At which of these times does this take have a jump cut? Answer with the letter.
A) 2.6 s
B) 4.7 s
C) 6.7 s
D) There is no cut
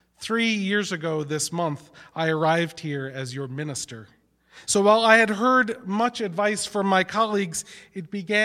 B